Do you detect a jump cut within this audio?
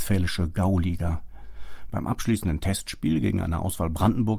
yes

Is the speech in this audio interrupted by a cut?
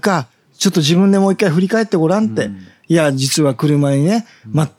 no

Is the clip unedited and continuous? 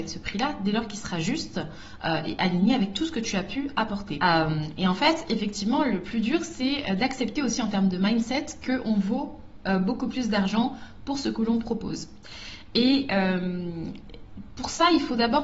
no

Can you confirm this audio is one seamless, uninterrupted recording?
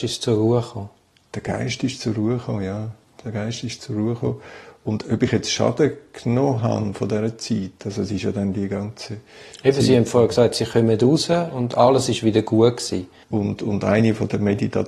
no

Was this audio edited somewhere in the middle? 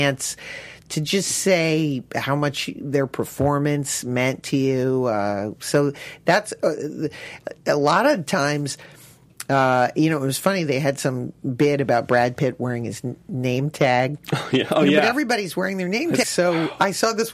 yes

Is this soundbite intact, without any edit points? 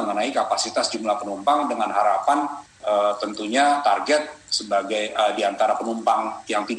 yes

